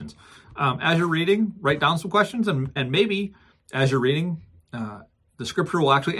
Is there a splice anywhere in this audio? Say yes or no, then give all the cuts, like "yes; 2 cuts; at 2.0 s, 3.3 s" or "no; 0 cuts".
no; 0 cuts